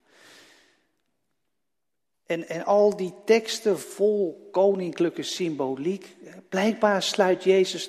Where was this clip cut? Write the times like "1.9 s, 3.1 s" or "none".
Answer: 3.8 s